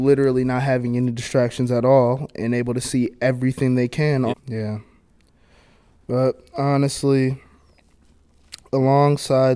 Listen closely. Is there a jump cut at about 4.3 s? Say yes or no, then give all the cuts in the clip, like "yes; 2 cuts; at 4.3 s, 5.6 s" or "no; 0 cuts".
yes; 1 cut; at 4.3 s